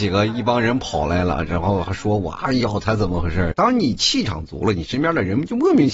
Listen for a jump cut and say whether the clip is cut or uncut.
cut